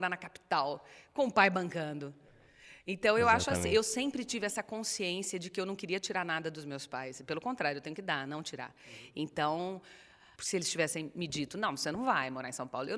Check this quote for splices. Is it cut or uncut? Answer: cut